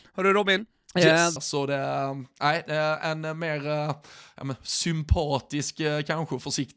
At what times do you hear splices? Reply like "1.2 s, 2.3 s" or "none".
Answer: 1.4 s